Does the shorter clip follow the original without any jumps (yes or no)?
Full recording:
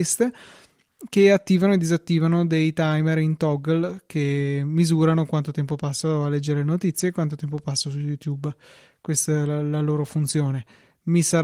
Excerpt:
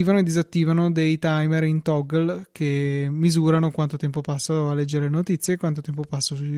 yes